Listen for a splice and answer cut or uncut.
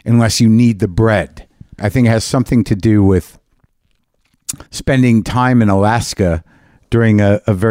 cut